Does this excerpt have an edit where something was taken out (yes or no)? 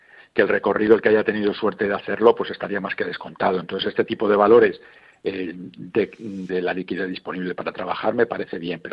yes